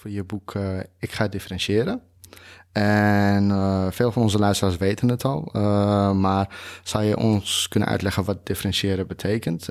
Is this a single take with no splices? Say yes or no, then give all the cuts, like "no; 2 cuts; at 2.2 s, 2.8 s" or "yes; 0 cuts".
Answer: yes; 0 cuts